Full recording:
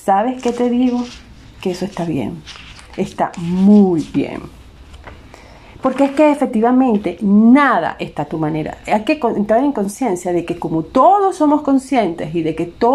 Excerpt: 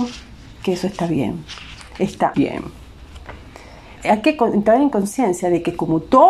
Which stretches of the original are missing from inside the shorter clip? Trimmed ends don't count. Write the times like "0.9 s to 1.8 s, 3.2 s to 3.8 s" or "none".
3.3 s to 4.1 s, 5.8 s to 8.8 s